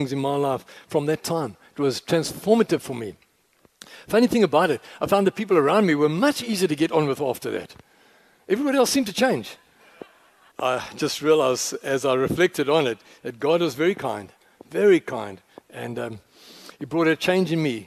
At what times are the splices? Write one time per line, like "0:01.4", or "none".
0:10.5